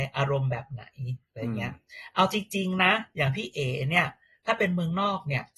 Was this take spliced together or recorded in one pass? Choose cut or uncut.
uncut